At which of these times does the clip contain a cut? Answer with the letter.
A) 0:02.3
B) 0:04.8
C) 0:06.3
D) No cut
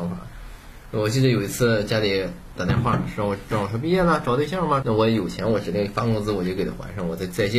B